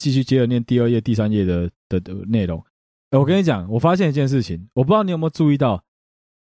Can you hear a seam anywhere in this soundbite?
no; 0 cuts

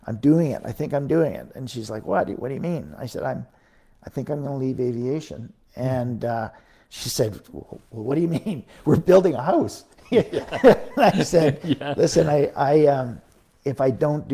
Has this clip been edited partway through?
no; 0 cuts

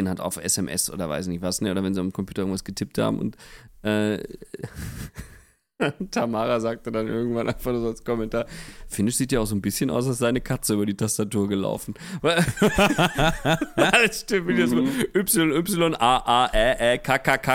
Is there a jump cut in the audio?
no; 0 cuts

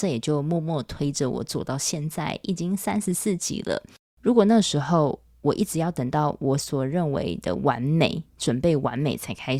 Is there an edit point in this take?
no; 0 cuts

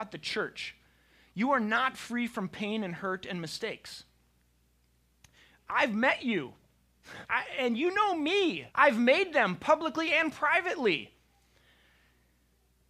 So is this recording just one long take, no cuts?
no; 2 cuts; at 7.2 s, 8.7 s

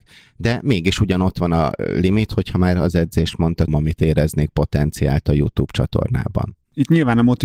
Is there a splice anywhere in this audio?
yes; 1 cut; at 3.7 s

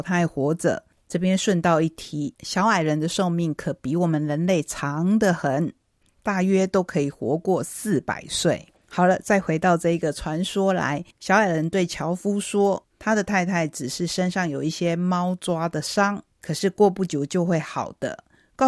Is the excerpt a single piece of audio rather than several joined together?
yes; 0 cuts

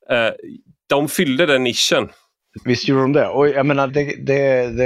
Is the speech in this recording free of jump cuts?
no; 2 cuts; at 2.6 s, 3.9 s

